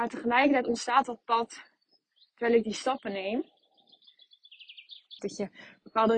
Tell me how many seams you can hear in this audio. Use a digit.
1